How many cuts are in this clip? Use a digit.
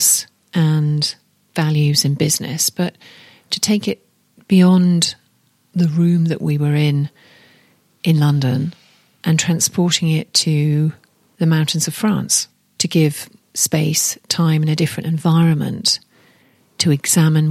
0